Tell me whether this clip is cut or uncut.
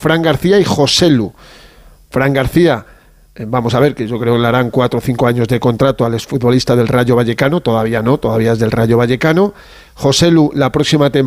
uncut